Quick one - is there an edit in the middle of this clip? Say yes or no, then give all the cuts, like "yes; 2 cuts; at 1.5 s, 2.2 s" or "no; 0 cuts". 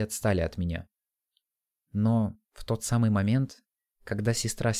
no; 0 cuts